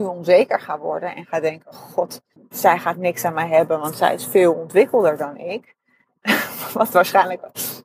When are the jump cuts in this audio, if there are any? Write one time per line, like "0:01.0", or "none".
0:02.4